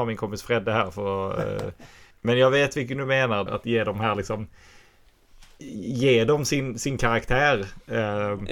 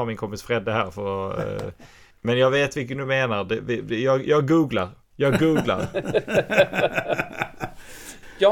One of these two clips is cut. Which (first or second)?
first